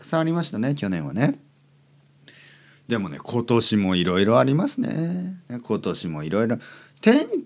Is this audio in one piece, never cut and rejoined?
yes; 0 cuts

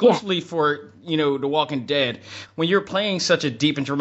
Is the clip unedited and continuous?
yes; 0 cuts

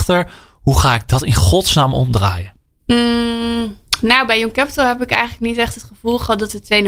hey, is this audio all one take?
yes; 0 cuts

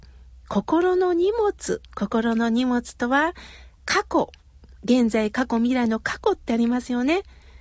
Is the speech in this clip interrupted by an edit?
yes; 2 cuts; at 1.9 s, 3.8 s

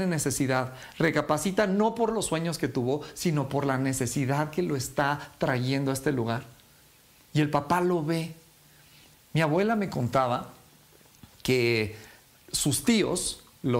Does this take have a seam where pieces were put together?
no; 0 cuts

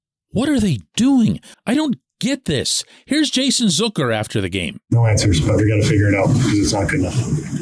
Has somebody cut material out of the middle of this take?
yes; 1 cut; at 1.5 s

